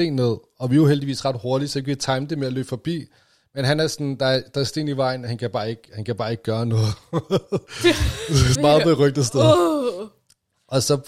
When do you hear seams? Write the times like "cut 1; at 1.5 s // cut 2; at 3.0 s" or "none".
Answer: cut 1; at 8.6 s